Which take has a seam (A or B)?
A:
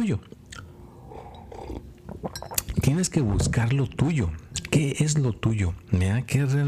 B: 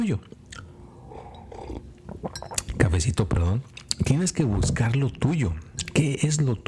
A